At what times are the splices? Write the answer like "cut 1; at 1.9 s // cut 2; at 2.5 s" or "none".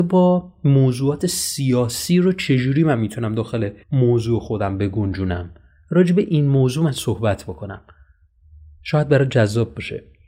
cut 1; at 3.8 s